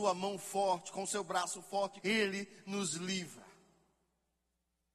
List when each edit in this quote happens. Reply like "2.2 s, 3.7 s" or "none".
2.0 s